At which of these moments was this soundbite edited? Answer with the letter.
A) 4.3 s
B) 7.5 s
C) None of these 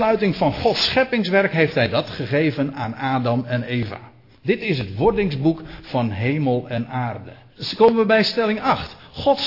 B